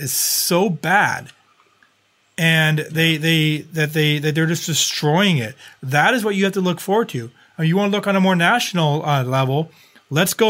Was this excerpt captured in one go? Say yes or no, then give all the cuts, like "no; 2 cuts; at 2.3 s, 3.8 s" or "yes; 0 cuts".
yes; 0 cuts